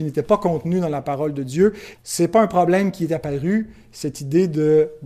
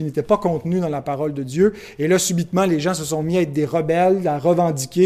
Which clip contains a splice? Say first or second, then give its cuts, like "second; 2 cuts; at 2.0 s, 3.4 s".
first; 1 cut; at 1.9 s